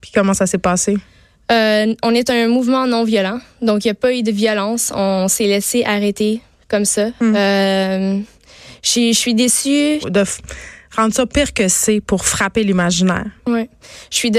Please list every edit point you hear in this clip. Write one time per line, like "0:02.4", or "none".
0:10.0